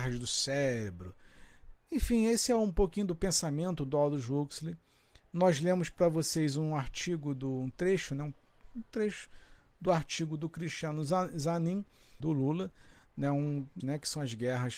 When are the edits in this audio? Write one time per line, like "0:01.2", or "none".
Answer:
0:01.7
0:12.2
0:13.8

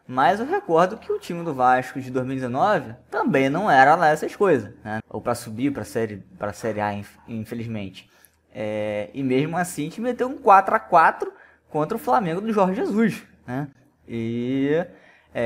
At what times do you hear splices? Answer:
0:05.0

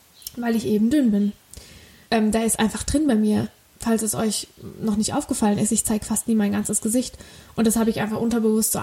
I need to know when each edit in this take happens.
0:02.0

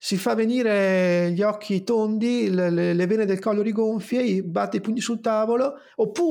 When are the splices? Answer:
none

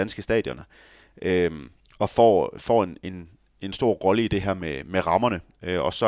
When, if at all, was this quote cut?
none

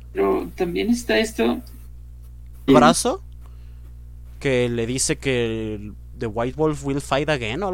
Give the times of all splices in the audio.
0:02.7

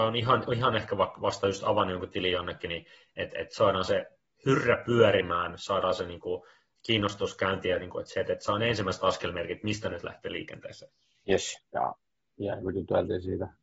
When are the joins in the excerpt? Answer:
0:11.6
0:12.6

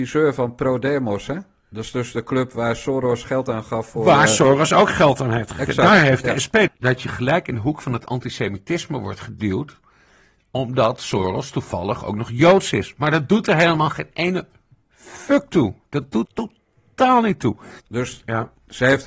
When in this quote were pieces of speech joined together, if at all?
0:06.7
0:16.3
0:17.8

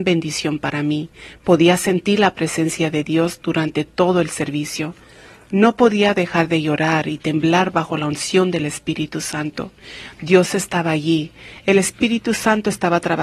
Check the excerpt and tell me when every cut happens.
none

